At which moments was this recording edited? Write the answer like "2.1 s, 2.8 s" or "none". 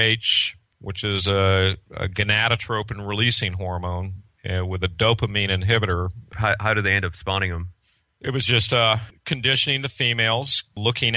6.3 s